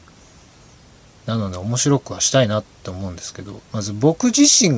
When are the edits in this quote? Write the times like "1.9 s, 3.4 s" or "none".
3.6 s